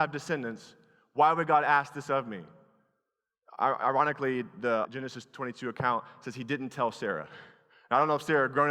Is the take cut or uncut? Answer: cut